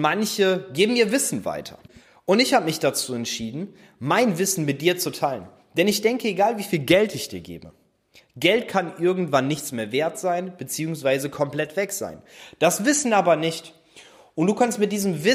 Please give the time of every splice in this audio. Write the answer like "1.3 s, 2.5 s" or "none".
none